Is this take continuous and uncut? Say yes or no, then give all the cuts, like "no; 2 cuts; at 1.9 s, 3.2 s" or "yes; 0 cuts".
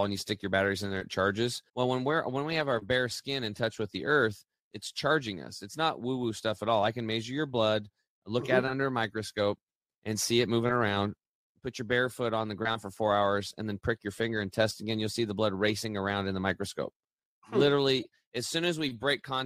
no; 1 cut; at 1.7 s